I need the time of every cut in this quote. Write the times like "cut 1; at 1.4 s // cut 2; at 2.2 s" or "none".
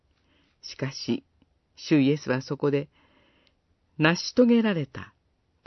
none